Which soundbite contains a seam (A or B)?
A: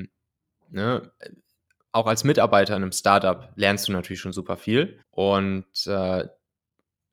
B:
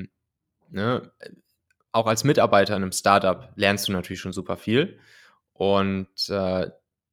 A